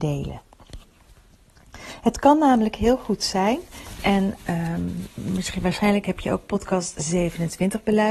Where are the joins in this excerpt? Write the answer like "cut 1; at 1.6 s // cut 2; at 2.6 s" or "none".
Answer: none